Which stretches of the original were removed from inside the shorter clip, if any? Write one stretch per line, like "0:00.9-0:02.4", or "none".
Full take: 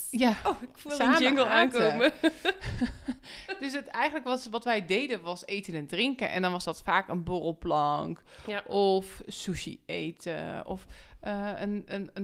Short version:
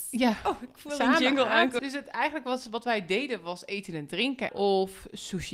0:01.8-0:03.6
0:06.3-0:08.6